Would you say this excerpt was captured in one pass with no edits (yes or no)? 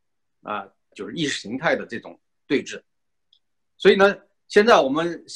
no